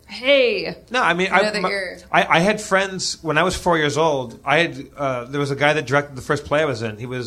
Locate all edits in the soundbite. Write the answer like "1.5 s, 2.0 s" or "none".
none